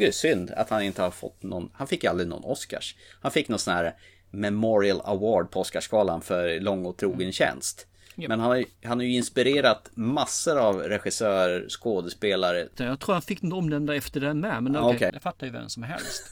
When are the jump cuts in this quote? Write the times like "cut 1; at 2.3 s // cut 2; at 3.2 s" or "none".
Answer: cut 1; at 12.8 s // cut 2; at 15.1 s